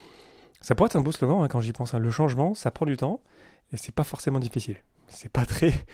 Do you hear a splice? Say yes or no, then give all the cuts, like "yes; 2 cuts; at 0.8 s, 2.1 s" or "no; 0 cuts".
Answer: no; 0 cuts